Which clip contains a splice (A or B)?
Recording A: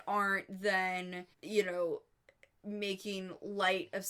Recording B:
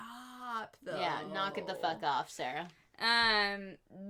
A